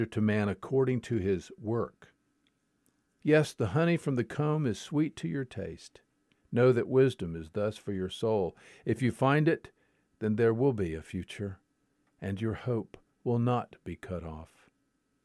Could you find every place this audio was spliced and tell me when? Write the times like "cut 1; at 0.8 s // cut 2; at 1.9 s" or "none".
cut 1; at 3.2 s